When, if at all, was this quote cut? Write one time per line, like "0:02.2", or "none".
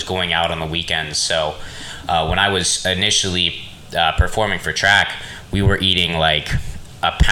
none